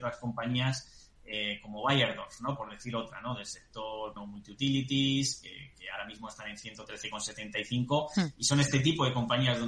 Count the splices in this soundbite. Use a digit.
1